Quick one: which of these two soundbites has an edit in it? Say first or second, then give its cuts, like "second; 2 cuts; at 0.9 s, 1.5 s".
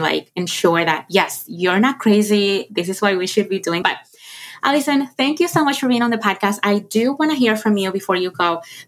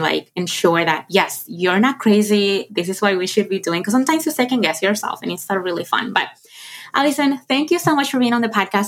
first; 1 cut; at 3.8 s